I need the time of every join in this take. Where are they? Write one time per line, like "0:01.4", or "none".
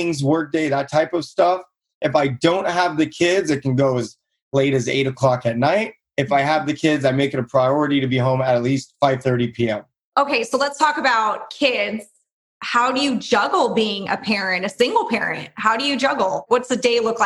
none